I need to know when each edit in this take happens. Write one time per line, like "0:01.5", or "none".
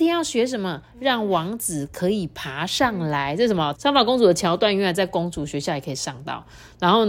0:03.7